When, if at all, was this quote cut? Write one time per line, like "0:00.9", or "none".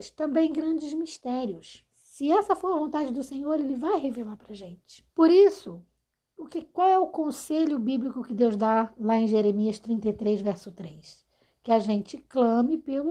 0:05.1